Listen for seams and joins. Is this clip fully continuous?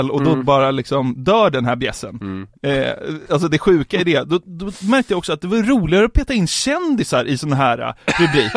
yes; 0 cuts

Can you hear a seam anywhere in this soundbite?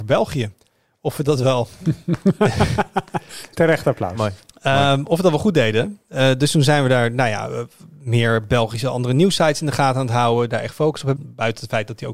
yes; 1 cut; at 11.2 s

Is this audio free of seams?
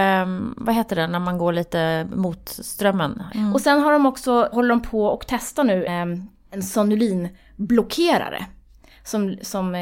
no; 3 cuts; at 3.3 s, 4.5 s, 5.9 s

